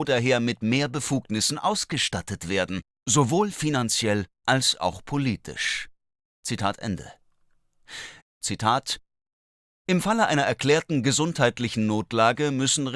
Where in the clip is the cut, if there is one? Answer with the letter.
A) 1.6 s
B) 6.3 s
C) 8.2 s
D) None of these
C